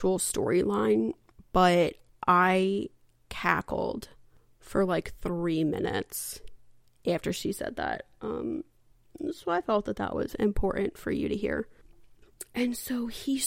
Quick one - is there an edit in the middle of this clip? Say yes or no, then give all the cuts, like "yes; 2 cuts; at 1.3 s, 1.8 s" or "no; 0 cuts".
no; 0 cuts